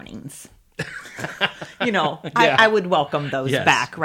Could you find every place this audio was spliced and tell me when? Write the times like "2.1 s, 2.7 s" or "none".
none